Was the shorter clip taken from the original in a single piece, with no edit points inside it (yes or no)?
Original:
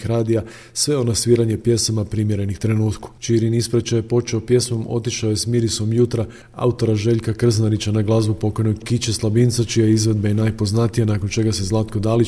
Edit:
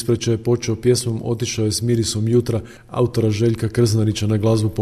yes